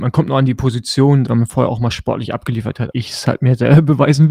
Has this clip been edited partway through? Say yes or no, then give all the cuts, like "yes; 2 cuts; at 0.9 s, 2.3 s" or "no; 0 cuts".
yes; 2 cuts; at 1.3 s, 2.9 s